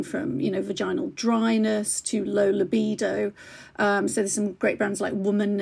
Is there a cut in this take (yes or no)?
no